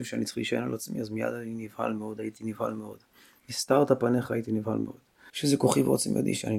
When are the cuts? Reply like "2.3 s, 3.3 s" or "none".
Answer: 5.3 s